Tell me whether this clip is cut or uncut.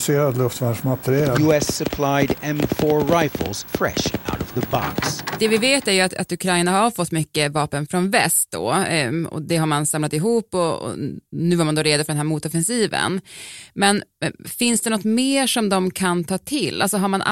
uncut